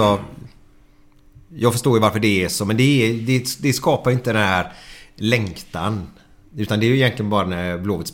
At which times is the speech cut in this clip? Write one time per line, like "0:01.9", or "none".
none